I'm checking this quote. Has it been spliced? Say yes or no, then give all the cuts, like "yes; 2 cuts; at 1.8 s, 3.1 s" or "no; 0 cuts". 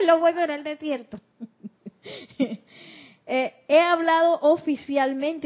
no; 0 cuts